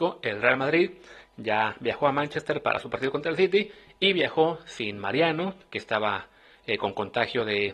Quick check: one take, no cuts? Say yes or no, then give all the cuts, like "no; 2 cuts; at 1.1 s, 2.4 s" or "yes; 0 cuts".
yes; 0 cuts